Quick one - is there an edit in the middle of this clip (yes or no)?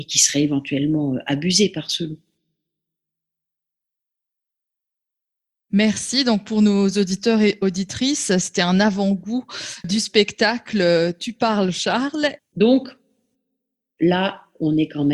yes